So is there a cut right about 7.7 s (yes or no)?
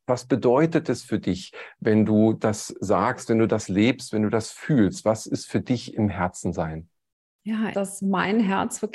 yes